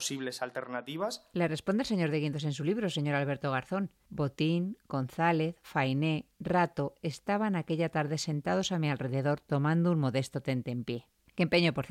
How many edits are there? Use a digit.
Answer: 0